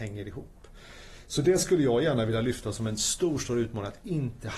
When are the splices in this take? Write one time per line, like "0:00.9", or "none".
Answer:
none